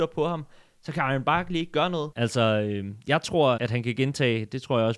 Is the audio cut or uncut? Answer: cut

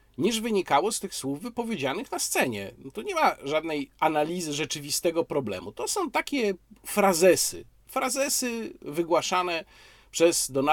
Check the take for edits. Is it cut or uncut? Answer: uncut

